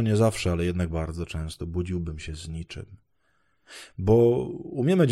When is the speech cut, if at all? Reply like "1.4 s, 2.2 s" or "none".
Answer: 0.9 s